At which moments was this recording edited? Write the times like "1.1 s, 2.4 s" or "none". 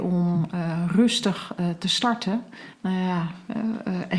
2.7 s